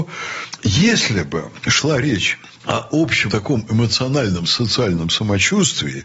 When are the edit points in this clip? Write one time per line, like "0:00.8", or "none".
0:03.3